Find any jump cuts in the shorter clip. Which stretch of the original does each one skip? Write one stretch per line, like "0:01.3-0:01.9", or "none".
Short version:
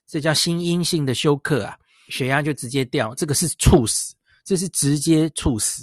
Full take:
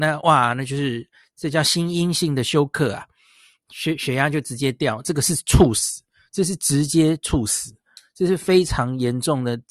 0:03.4-0:04.0